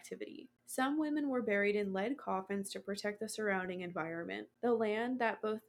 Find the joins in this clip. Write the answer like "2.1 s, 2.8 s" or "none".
none